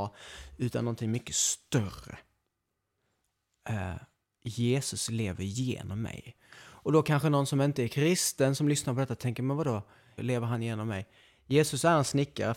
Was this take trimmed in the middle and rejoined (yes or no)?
yes